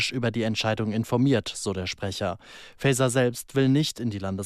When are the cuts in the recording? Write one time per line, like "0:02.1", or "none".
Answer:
none